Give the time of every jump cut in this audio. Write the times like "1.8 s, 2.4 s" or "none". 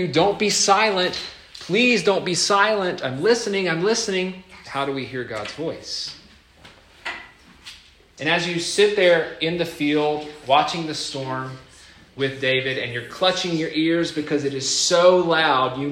4.7 s, 8.2 s